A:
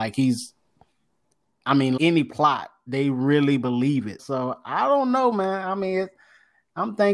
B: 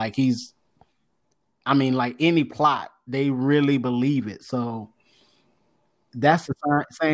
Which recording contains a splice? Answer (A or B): A